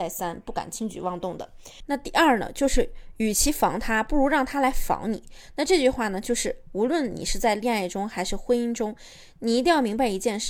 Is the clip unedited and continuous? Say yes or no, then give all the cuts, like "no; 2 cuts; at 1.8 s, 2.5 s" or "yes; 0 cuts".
yes; 0 cuts